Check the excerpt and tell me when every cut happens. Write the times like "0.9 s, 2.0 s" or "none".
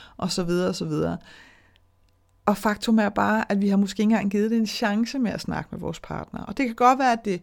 none